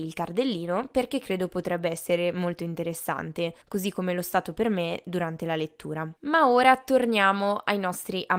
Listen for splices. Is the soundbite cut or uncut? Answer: cut